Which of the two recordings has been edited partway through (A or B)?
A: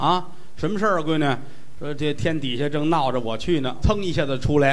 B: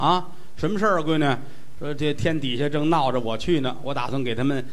A